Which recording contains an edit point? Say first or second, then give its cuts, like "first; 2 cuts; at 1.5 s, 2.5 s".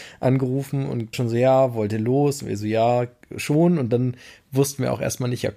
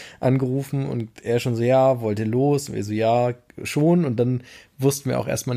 first; 1 cut; at 1.1 s